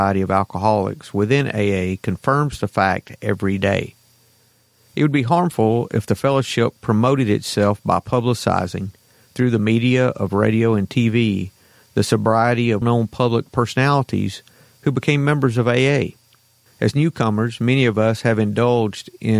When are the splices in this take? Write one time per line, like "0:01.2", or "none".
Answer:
0:12.8
0:16.7